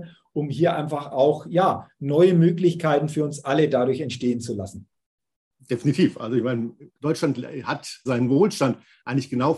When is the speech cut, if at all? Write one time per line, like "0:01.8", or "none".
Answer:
0:08.1